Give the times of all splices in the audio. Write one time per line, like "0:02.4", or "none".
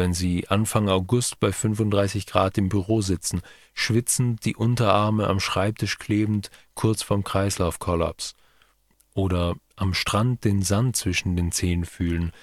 none